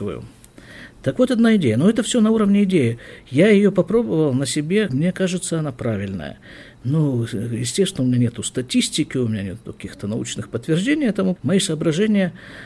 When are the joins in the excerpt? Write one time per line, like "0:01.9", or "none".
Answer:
0:04.9
0:11.4